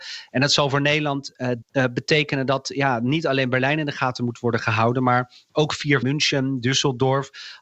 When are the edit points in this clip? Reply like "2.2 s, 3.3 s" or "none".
1.6 s, 6.0 s